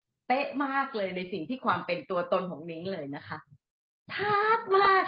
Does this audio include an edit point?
no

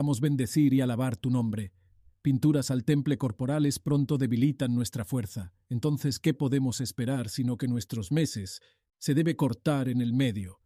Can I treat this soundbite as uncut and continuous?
no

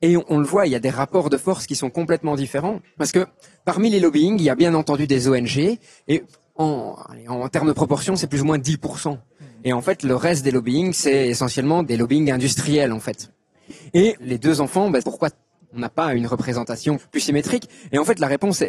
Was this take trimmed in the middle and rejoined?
yes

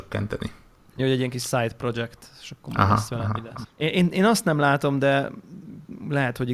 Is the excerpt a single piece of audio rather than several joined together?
no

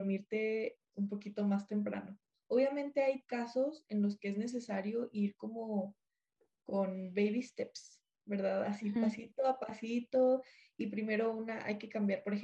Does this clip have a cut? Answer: yes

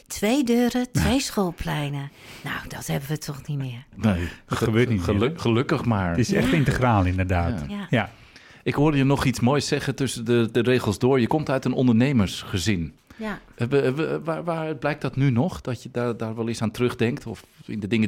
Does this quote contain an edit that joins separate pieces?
no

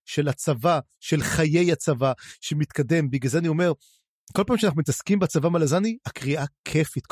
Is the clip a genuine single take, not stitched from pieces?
yes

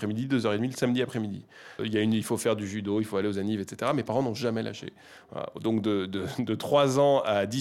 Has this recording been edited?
yes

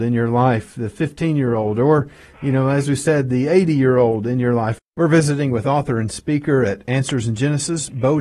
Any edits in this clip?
yes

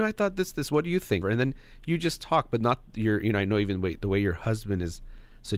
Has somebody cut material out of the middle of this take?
yes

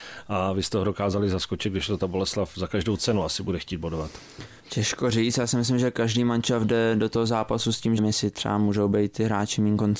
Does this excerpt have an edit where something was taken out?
yes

